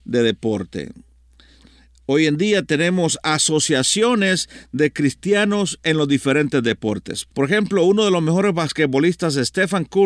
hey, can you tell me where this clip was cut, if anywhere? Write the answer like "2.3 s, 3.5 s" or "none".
none